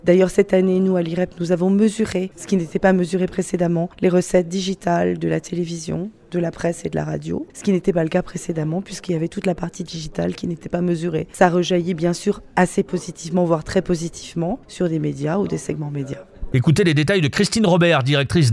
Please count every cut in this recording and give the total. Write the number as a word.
two